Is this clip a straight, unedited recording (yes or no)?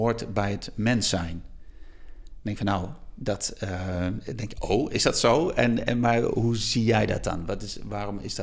yes